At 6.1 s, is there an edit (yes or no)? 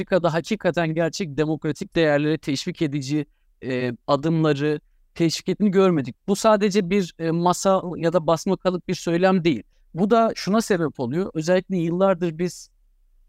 yes